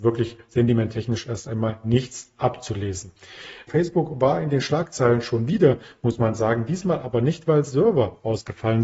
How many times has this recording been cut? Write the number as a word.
one